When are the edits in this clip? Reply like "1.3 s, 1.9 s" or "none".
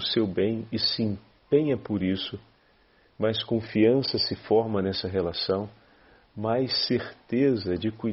none